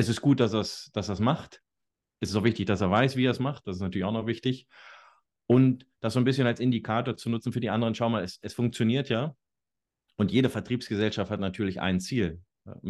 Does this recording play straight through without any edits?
yes; 0 cuts

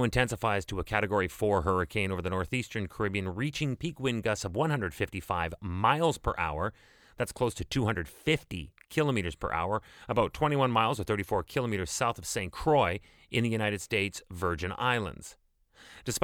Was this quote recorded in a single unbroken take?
yes; 0 cuts

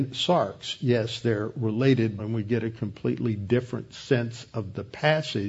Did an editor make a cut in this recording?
yes; 1 cut; at 2.2 s

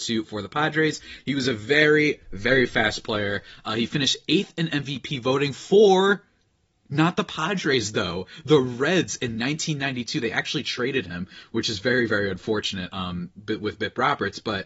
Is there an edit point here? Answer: no; 0 cuts

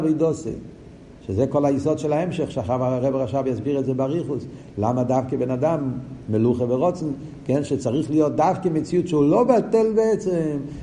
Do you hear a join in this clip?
no; 0 cuts

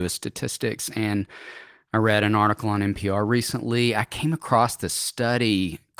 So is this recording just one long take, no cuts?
yes; 0 cuts

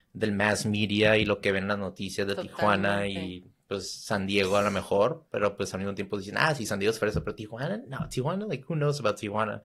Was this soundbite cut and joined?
no; 0 cuts

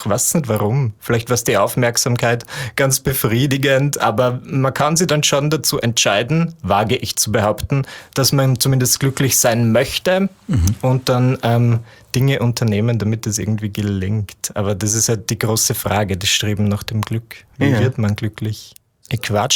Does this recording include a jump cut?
no; 0 cuts

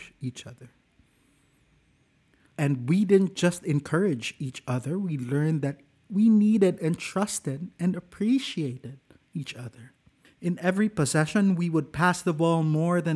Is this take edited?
no; 0 cuts

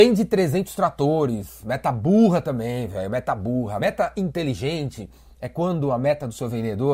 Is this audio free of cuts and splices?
yes; 0 cuts

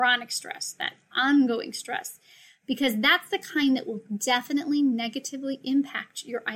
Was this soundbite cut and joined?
no; 0 cuts

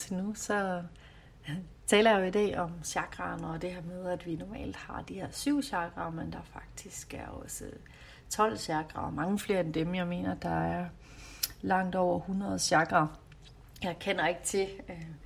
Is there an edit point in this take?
no; 0 cuts

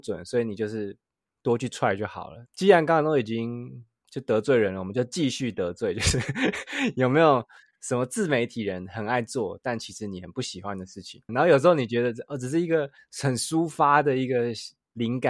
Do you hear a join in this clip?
yes; 1 cut; at 11.3 s

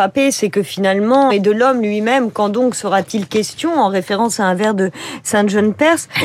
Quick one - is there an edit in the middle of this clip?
yes; 1 cut; at 1.3 s

